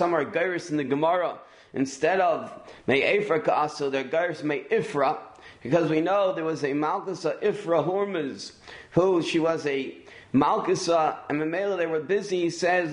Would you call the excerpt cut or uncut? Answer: uncut